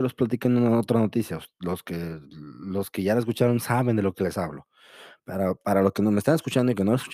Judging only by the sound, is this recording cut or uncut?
uncut